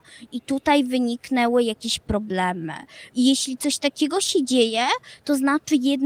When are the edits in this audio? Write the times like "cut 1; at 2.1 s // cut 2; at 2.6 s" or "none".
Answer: cut 1; at 3.1 s